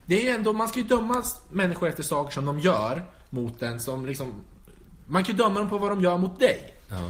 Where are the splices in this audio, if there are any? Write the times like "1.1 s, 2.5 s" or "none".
none

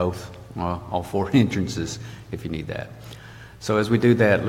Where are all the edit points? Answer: none

